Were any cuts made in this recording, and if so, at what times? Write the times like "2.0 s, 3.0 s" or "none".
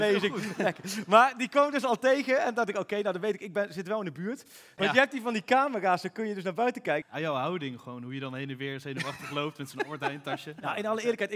4.8 s, 7.0 s